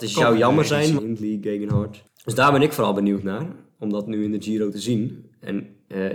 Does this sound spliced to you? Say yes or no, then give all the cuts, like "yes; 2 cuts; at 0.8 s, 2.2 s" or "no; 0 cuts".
yes; 2 cuts; at 1.0 s, 2.1 s